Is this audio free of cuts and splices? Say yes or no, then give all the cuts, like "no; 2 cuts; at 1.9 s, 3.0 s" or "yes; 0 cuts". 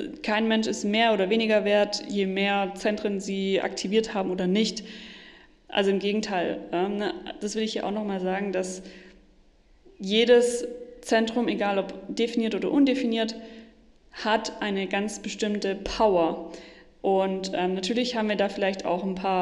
yes; 0 cuts